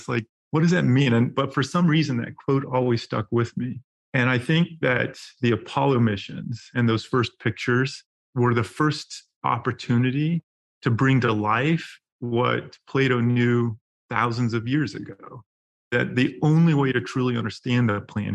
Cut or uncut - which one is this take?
uncut